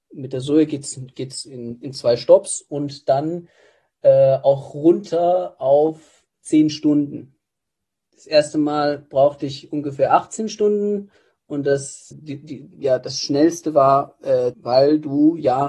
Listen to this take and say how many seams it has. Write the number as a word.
two